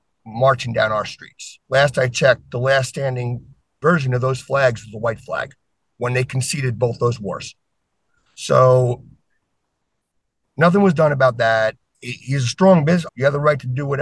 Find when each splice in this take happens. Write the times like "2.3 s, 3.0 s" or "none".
1.6 s, 11.9 s, 13.1 s